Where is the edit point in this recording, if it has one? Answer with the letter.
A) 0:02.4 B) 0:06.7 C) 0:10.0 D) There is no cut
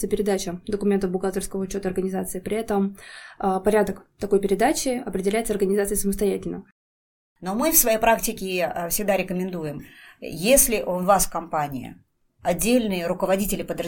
D